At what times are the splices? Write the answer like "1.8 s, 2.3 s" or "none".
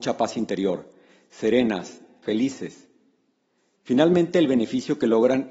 2.2 s

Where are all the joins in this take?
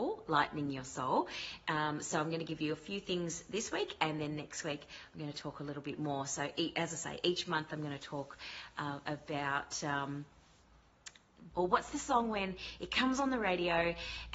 11.5 s

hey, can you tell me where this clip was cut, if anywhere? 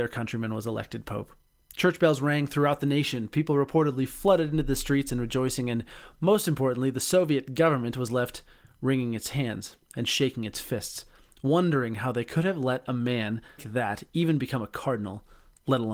13.6 s

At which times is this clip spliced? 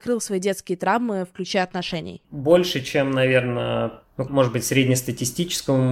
2.2 s, 4.3 s

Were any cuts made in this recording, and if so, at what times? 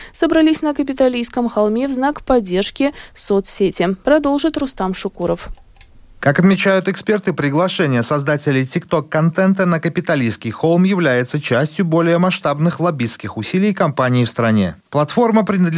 none

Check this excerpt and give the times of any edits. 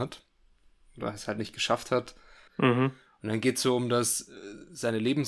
2.5 s

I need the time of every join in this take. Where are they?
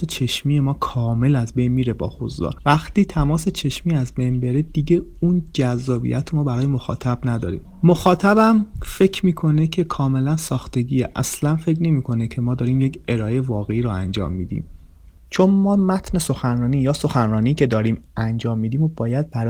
none

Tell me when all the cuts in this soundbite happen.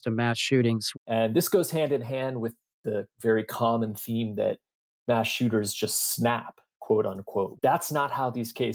0.9 s, 7.6 s

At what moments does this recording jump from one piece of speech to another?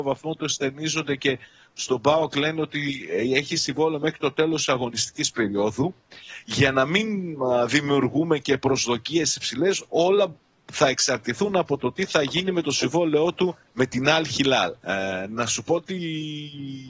13.7 s, 14.8 s

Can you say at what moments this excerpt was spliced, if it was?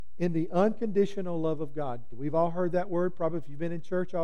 2.1 s

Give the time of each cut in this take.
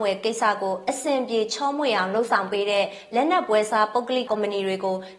4.3 s

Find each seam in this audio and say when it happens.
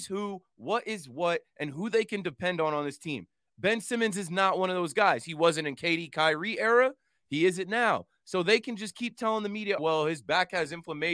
9.8 s

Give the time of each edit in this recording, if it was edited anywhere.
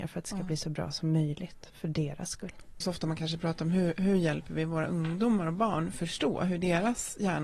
2.8 s

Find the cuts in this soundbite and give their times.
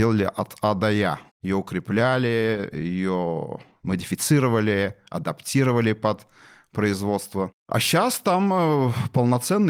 none

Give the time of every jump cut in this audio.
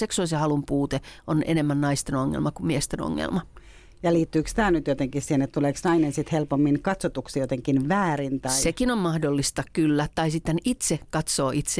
none

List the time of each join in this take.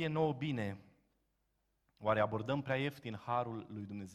none

